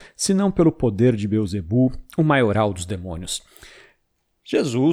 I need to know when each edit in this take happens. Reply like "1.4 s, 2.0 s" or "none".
none